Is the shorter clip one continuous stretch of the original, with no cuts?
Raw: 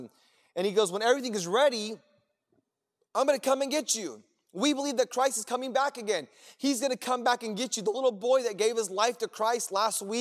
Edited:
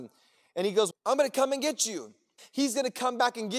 no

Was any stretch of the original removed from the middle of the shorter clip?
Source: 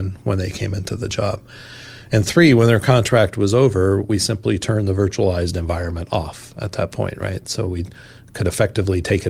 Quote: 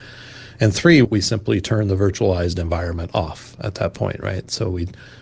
yes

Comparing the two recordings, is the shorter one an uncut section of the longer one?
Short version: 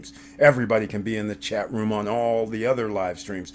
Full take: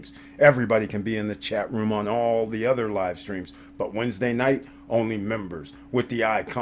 yes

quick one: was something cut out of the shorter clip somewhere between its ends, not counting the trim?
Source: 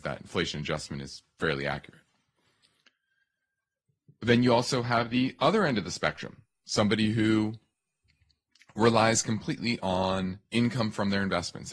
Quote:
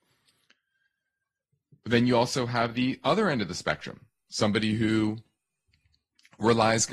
no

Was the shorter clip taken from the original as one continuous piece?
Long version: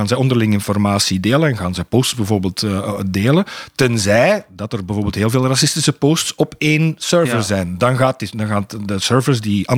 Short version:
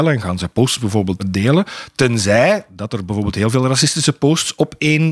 no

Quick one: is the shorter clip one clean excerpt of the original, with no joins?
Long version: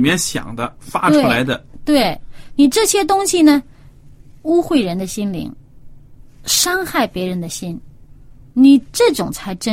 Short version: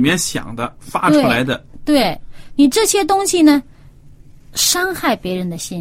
no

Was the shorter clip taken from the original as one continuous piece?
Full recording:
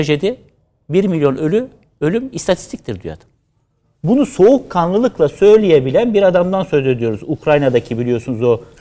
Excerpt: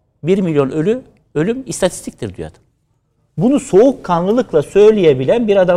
yes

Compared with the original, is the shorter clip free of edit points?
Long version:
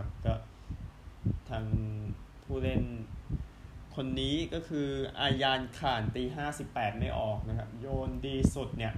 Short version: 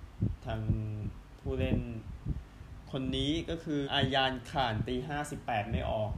no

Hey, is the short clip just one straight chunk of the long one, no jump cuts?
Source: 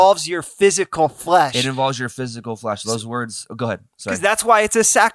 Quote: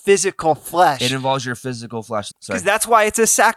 no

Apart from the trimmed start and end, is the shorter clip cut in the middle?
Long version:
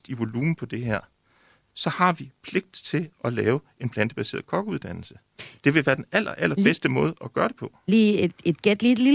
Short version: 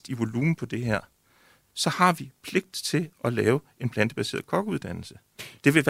no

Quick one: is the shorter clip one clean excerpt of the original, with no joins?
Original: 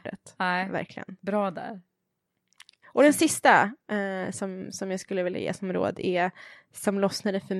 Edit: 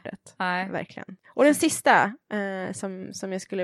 no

